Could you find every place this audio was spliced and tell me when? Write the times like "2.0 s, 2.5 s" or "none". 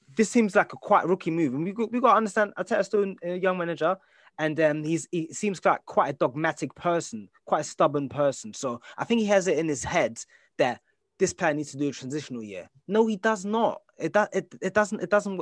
12.8 s